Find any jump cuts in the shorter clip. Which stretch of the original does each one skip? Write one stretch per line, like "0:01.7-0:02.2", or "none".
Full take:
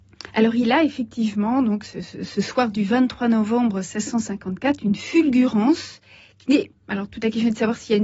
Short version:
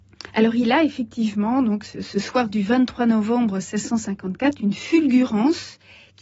0:01.9-0:02.2